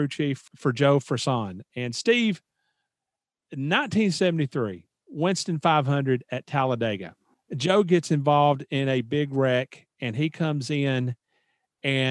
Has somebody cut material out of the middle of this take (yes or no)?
no